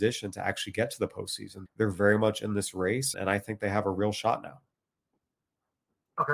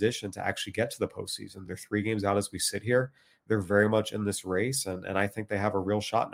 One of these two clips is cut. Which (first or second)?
first